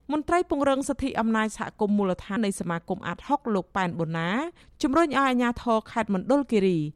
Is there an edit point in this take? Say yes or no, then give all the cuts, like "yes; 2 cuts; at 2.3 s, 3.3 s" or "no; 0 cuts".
yes; 1 cut; at 2.4 s